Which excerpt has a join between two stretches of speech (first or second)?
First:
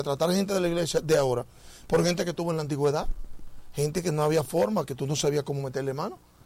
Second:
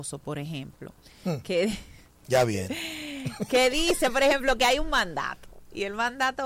first